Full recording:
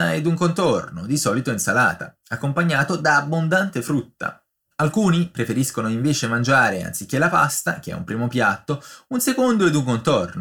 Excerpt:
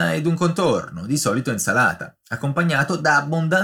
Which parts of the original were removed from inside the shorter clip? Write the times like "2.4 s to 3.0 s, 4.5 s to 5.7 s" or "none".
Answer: none